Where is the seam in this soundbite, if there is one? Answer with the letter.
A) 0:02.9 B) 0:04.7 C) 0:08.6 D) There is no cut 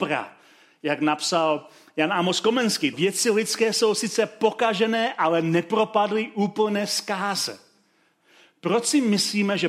A